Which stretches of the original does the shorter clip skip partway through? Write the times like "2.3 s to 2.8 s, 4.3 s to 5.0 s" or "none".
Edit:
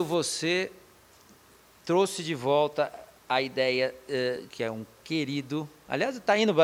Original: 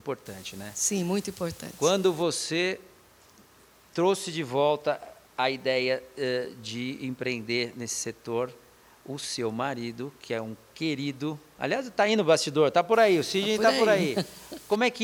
6.6 s to 10.2 s